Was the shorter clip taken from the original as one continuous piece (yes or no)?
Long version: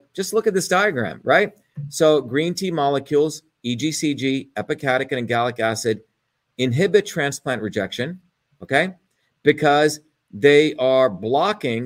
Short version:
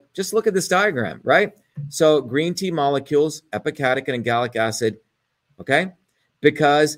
no